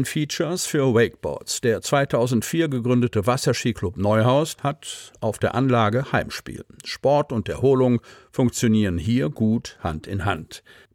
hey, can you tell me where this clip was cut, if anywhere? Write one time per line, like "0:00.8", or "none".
0:04.6